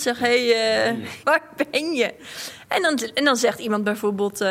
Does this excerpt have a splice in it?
yes; 1 cut; at 1.2 s

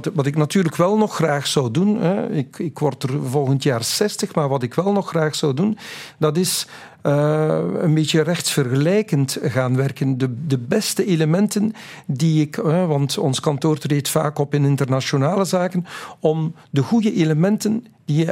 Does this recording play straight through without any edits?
yes; 0 cuts

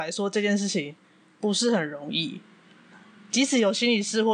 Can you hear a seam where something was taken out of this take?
no; 0 cuts

